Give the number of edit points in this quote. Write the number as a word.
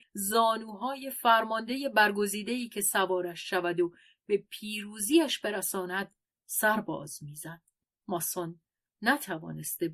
zero